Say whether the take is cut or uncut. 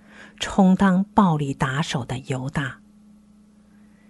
uncut